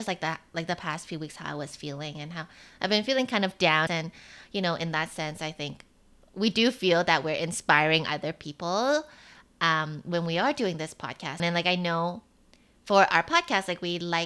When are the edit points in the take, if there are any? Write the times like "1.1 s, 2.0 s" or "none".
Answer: 3.9 s, 11.4 s